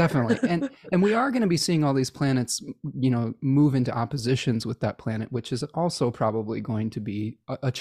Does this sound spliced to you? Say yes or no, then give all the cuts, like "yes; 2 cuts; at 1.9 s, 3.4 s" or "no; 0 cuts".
no; 0 cuts